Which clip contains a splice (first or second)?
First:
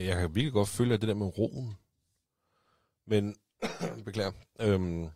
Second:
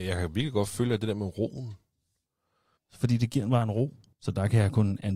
second